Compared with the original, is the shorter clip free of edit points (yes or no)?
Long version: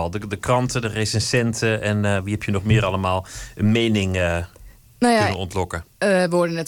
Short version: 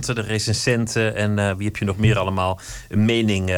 yes